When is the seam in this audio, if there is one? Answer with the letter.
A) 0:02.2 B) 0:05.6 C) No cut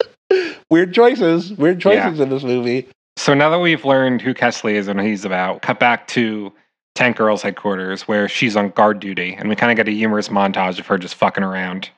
B